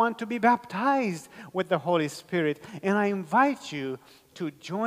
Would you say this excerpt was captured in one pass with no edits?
yes; 0 cuts

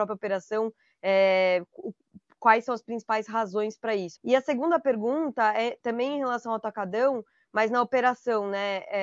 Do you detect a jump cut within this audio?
yes; 1 cut; at 4.2 s

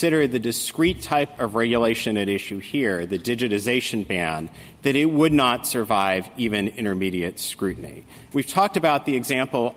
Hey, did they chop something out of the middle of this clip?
yes; 1 cut; at 8.3 s

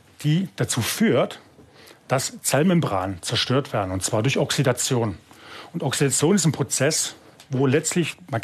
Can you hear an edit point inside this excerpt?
yes; 1 cut; at 7.5 s

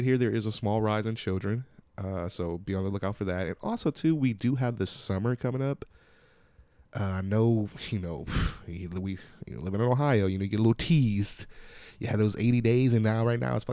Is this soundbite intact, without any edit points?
yes; 0 cuts

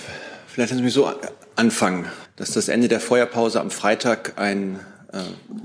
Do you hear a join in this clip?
yes; 1 cut; at 2.3 s

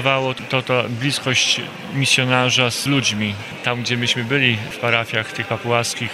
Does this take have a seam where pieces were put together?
no; 0 cuts

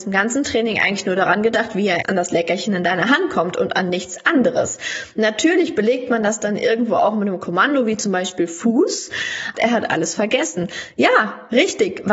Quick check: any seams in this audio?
yes; 1 cut; at 9.5 s

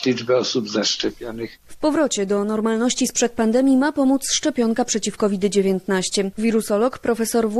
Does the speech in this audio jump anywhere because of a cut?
yes; 1 cut; at 1.6 s

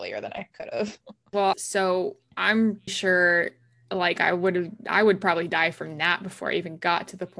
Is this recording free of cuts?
no; 2 cuts; at 1.5 s, 2.9 s

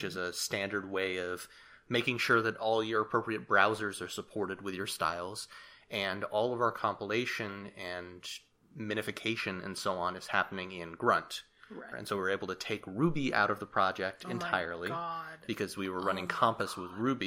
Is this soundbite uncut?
no; 1 cut; at 11.9 s

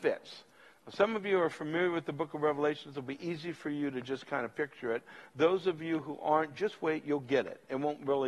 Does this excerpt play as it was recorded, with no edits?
yes; 0 cuts

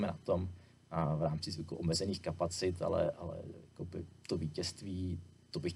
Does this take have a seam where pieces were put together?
no; 0 cuts

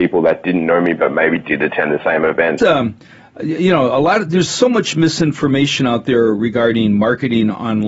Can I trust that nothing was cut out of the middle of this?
no; 1 cut; at 2.6 s

